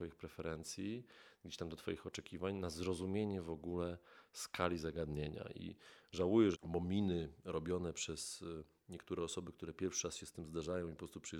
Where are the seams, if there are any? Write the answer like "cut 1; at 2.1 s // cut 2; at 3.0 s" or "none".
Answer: cut 1; at 6.5 s